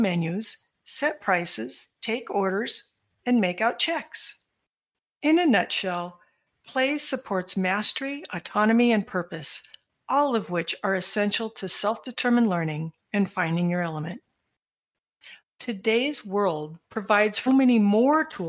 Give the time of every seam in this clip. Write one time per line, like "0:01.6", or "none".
0:15.4
0:17.5